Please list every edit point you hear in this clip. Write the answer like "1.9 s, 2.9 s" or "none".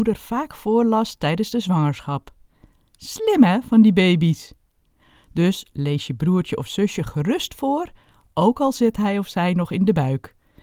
none

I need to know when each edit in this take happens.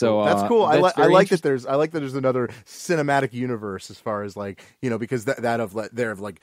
none

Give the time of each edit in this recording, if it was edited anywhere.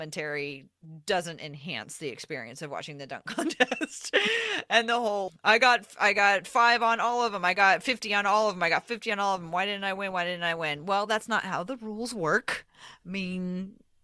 5.3 s

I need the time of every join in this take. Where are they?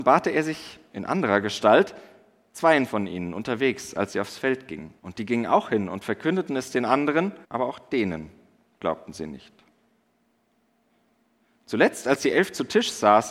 5.0 s, 7.4 s

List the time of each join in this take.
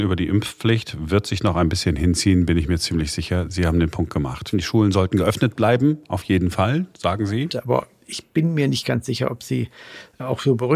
4.5 s, 7.5 s

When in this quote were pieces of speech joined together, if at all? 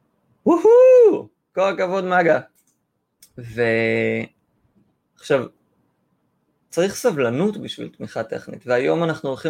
3.2 s, 5.1 s

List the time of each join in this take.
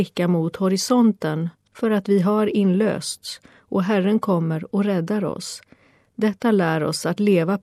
none

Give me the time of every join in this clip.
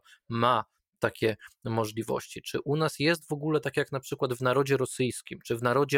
none

